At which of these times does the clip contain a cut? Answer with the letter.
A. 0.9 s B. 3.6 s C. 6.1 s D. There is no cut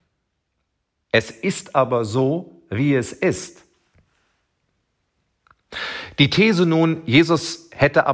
A